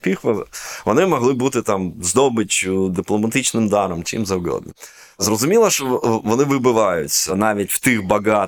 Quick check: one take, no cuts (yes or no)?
yes